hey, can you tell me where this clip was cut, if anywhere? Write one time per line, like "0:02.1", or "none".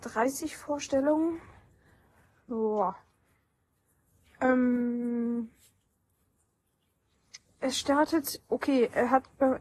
none